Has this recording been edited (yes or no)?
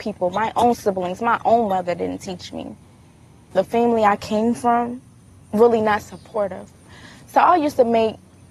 no